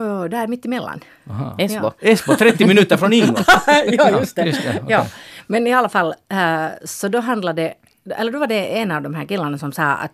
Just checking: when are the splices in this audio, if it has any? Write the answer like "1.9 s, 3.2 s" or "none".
none